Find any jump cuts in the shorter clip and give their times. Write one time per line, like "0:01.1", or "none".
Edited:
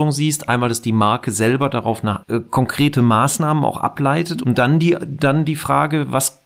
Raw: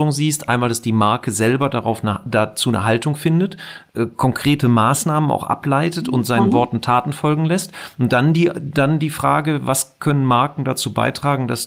0:02.2
0:04.4